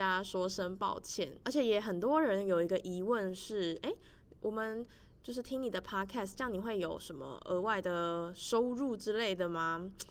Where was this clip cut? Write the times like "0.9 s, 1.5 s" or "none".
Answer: 1.4 s